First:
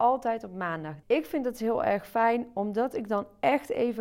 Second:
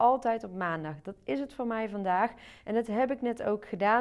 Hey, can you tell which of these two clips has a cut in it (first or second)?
first